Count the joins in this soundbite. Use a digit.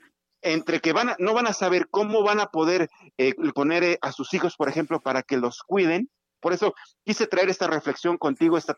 2